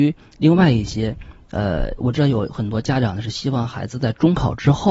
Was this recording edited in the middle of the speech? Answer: yes; 1 cut; at 2.0 s

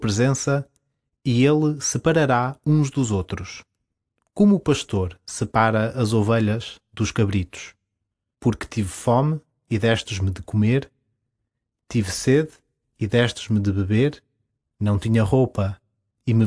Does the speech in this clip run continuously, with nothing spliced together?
no; 2 cuts; at 8.3 s, 14.6 s

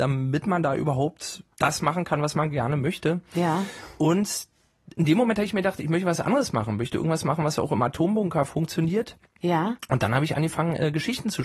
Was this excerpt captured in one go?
no; 1 cut; at 1.5 s

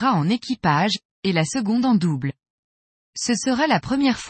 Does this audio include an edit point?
yes; 1 cut; at 3.1 s

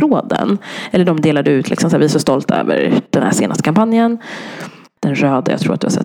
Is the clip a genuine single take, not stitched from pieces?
no; 1 cut; at 5.0 s

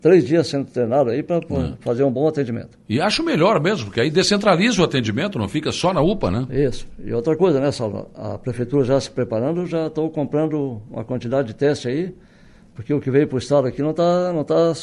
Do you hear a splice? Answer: no; 0 cuts

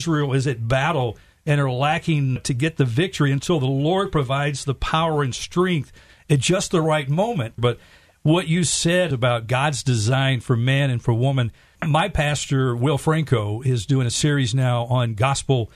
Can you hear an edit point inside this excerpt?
yes; 1 cut; at 7.6 s

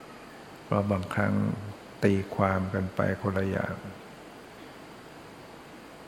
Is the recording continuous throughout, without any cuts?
yes; 0 cuts

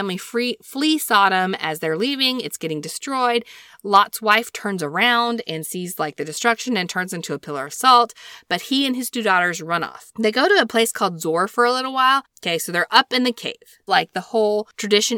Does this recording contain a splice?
yes; 3 cuts; at 10.1 s, 12.2 s, 13.9 s

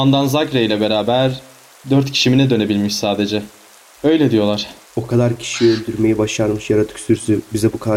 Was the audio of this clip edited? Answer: yes; 1 cut; at 4.8 s

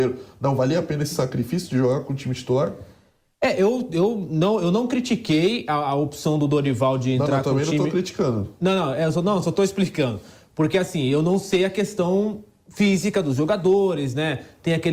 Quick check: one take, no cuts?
yes; 0 cuts

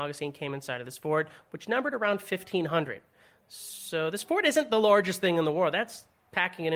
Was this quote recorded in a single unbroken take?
yes; 0 cuts

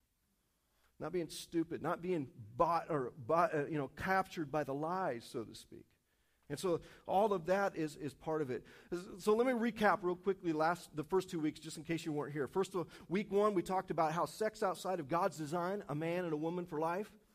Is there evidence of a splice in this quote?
no; 0 cuts

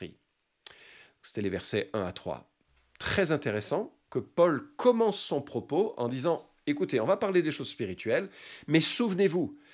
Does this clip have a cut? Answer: no; 0 cuts

